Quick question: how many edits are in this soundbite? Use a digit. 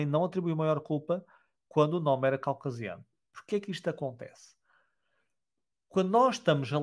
0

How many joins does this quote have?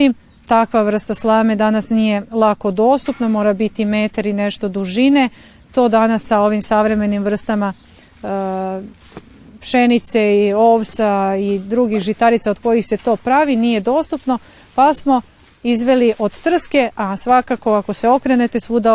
0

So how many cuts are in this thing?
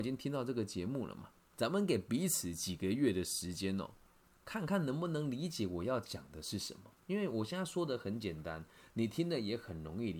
1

